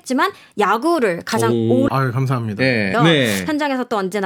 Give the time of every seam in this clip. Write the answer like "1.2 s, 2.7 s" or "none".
1.9 s, 2.9 s